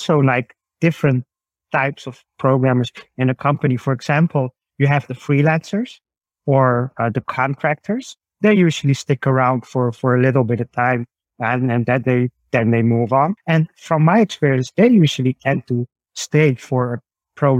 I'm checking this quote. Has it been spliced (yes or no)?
yes